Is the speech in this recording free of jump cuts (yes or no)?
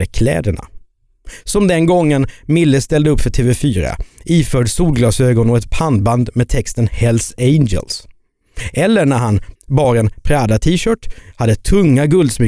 no